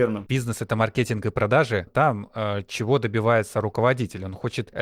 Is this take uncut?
no; 1 cut; at 1.9 s

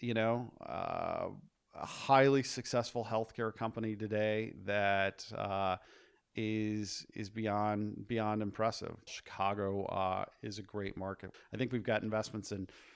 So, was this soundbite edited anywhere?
yes; 2 cuts; at 9.1 s, 11.3 s

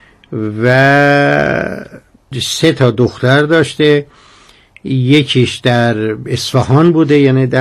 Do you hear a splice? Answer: no; 0 cuts

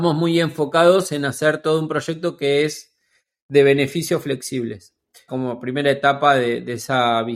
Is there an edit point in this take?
yes; 1 cut; at 5.3 s

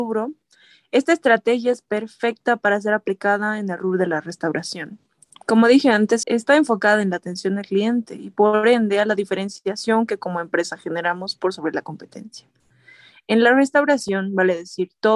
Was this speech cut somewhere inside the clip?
yes; 1 cut; at 6.2 s

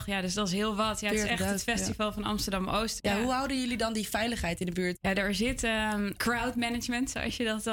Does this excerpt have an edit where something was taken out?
yes; 3 cuts; at 3.0 s, 4.9 s, 6.2 s

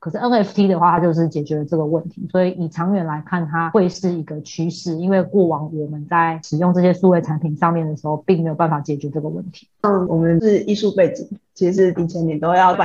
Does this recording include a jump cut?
yes; 2 cuts; at 9.7 s, 12.0 s

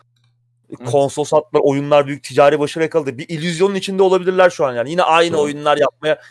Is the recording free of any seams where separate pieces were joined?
yes; 0 cuts

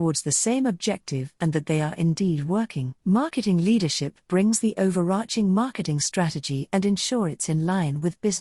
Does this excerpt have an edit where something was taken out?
yes; 1 cut; at 3.0 s

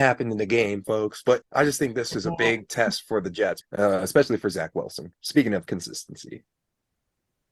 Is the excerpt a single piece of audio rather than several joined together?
no; 2 cuts; at 1.4 s, 3.6 s

